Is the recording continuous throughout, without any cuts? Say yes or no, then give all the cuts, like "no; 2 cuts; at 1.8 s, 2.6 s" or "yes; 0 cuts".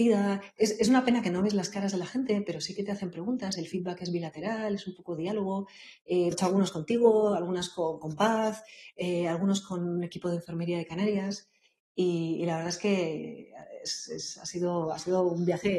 no; 2 cuts; at 3.6 s, 6.3 s